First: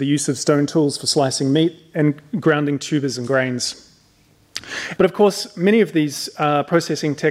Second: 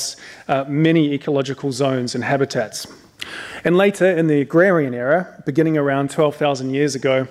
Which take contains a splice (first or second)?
first